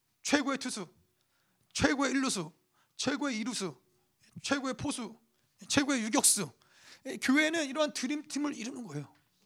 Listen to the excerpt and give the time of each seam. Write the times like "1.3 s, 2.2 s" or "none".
none